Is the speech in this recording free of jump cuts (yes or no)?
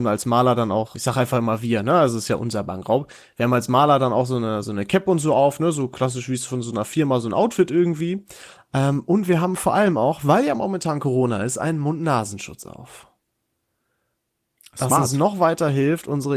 no